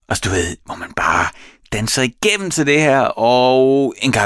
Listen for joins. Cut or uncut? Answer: uncut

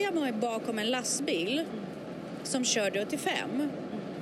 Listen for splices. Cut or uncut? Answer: uncut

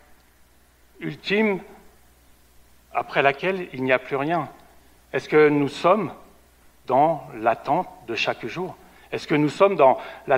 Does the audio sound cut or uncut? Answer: uncut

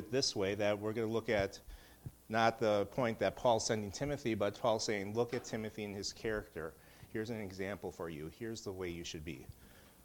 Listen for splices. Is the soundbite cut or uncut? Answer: uncut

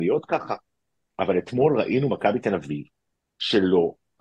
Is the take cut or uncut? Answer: uncut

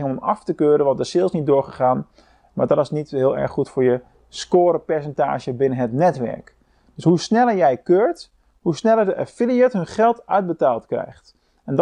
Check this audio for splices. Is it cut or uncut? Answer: uncut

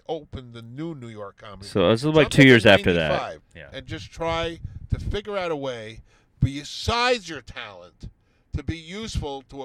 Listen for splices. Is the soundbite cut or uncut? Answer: cut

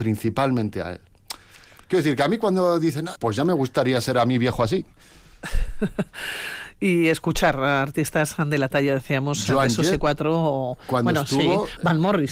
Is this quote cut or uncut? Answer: cut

